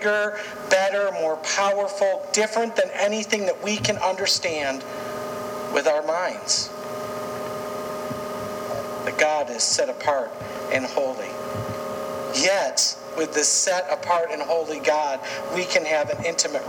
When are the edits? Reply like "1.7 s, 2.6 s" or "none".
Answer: none